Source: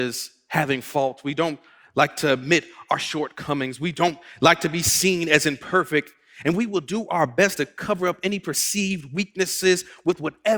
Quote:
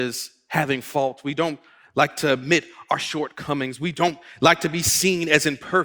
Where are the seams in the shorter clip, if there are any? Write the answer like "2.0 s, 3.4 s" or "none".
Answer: none